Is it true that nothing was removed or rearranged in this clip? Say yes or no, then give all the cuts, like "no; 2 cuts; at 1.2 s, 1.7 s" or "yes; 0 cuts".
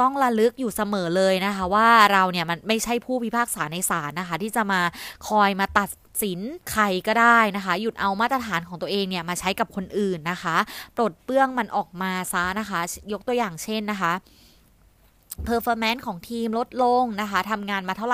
no; 1 cut; at 6.6 s